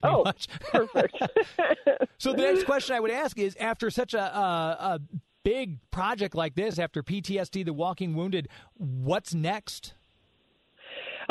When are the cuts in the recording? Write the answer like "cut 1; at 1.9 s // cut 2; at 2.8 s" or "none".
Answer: none